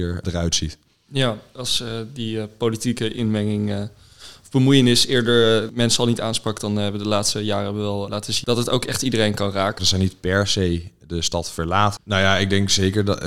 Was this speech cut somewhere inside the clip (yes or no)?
yes